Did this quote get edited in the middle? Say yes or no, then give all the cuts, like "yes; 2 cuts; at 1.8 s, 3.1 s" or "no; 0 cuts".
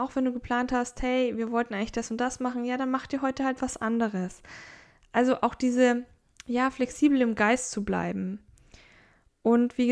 no; 0 cuts